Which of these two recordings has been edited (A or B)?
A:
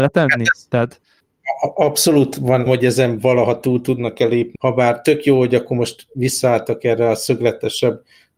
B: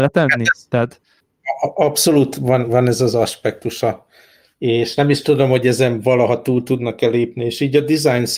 A